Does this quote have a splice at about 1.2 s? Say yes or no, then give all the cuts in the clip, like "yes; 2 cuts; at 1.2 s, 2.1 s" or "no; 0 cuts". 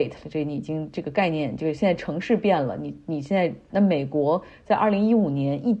no; 1 cut; at 3.7 s